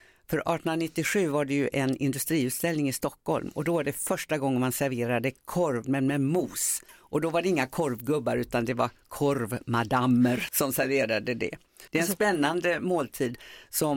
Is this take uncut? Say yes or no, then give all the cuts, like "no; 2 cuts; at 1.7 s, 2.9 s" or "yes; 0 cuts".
no; 3 cuts; at 5.8 s, 10.5 s, 11.9 s